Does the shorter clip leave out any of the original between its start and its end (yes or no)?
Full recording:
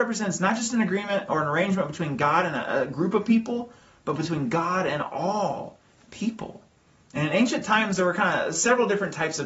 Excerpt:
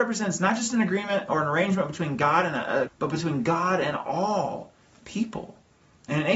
yes